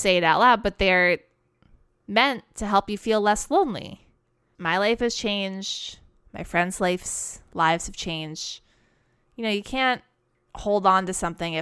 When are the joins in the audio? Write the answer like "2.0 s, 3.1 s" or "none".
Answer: 4.5 s

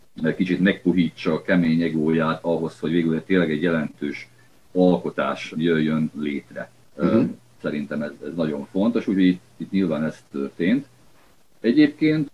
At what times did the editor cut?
none

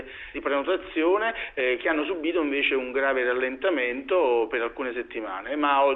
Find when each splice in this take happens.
none

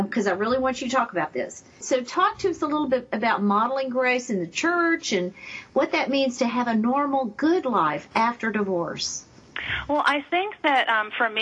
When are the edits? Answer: 1.8 s

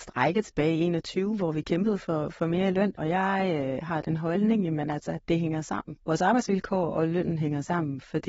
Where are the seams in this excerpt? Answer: 3.0 s

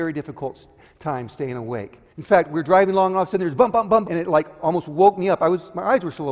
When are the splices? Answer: 2.1 s, 4.0 s

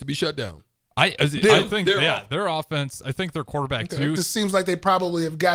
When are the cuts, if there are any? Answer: 4.2 s

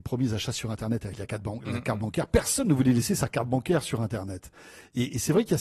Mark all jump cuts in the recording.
none

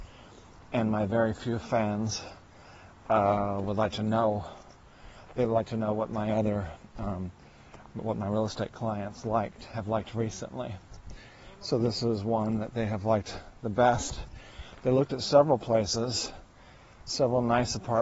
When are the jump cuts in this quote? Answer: none

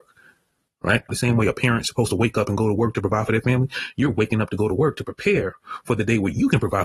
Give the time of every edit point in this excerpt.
1.1 s

